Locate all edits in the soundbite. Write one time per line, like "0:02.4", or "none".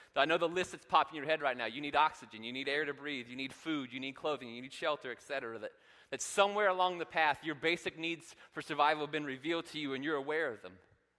none